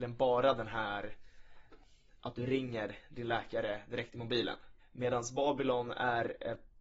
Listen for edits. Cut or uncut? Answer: cut